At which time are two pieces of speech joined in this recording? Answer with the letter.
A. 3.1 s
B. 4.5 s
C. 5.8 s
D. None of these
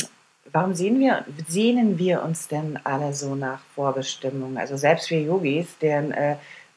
D